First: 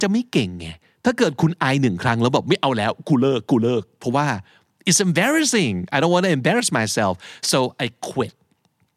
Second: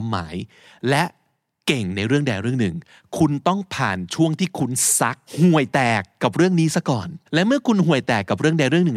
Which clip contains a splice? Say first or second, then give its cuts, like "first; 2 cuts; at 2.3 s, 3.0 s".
second; 2 cuts; at 5.3 s, 7.3 s